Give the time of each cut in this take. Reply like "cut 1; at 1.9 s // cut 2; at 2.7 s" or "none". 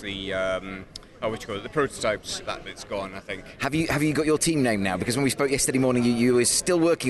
cut 1; at 2.5 s // cut 2; at 3.6 s